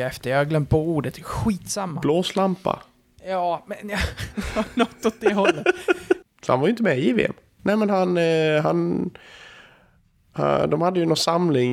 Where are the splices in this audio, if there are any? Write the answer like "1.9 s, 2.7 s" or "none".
6.2 s, 7.6 s